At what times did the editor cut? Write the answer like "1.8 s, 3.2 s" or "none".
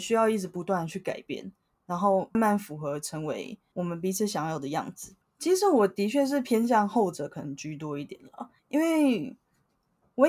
2.3 s, 5.2 s, 8.6 s